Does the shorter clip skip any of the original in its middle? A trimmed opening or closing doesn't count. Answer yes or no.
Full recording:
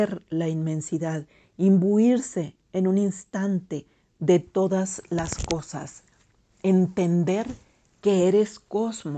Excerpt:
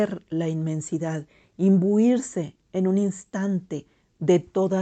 no